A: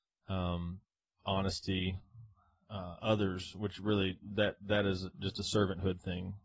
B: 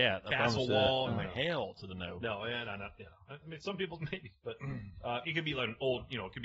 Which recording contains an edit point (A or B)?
B